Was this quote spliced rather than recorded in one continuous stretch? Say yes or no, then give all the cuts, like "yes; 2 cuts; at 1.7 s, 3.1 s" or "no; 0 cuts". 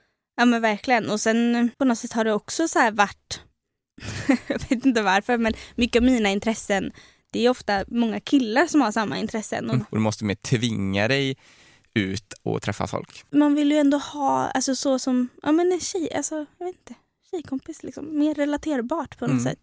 yes; 3 cuts; at 1.7 s, 9.8 s, 13.3 s